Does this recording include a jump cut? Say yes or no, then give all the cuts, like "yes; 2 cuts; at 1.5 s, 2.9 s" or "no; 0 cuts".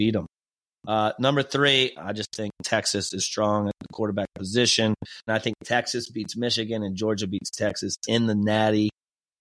yes; 3 cuts; at 2.0 s, 3.2 s, 5.3 s